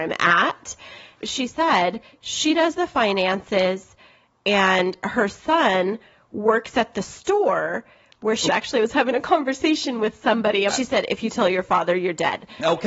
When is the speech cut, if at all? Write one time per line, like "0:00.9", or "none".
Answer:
0:01.1
0:08.5
0:10.7